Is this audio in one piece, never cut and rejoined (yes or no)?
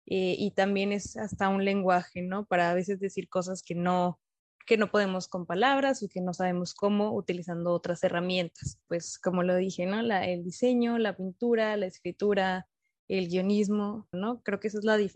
no